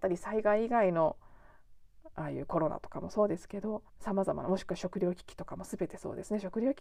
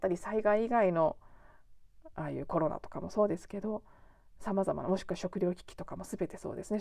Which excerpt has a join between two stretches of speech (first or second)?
first